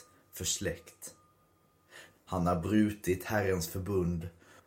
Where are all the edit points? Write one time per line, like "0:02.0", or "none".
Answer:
0:02.1